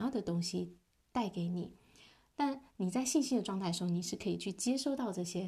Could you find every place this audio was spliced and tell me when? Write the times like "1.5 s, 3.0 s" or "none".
none